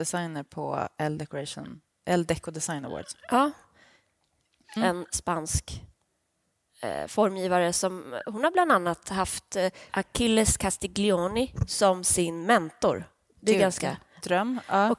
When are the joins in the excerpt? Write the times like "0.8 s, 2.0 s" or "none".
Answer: 4.8 s